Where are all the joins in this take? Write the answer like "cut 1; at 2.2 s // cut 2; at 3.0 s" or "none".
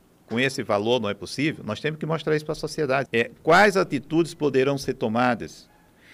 cut 1; at 3.1 s